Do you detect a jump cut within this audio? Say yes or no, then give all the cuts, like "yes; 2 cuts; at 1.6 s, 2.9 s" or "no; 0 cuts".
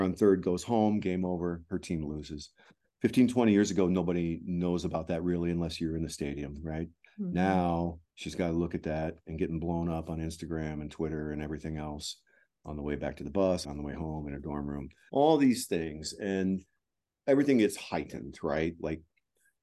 yes; 3 cuts; at 8.1 s, 13.6 s, 15.1 s